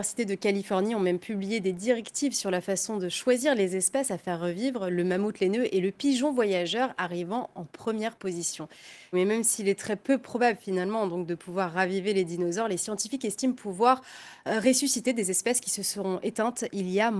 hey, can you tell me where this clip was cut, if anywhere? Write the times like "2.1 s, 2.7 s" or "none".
9.1 s